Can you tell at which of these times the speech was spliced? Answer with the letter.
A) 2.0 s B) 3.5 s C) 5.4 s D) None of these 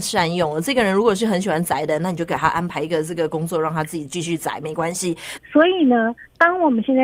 C